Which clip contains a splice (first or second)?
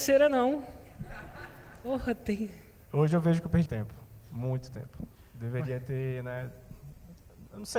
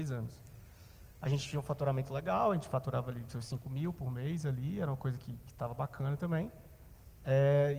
first